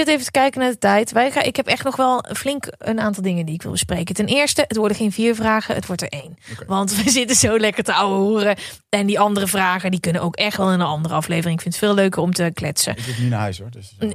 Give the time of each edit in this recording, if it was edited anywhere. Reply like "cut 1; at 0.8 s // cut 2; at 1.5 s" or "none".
none